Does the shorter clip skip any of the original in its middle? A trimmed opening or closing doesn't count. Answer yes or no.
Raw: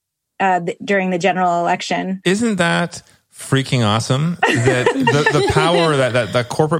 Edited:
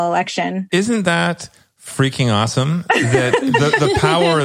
no